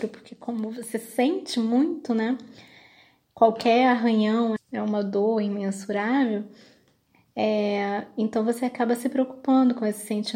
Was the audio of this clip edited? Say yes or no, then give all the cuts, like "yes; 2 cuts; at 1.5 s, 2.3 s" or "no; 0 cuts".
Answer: yes; 1 cut; at 4.6 s